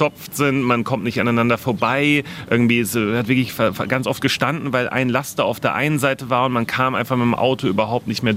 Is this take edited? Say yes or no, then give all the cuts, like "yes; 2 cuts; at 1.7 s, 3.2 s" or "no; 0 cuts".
no; 0 cuts